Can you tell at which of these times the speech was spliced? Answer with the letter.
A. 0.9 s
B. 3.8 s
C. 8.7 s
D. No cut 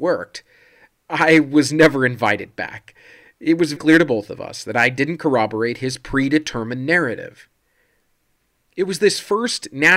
B